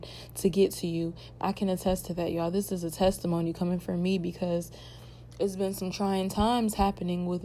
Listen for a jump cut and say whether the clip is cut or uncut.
cut